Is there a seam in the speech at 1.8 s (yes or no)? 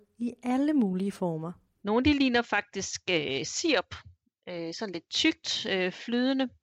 yes